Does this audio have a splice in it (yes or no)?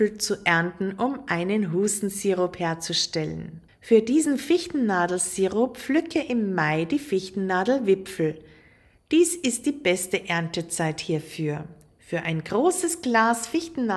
no